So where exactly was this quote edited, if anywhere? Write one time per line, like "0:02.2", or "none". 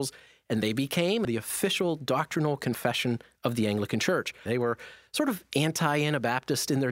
0:01.2
0:04.5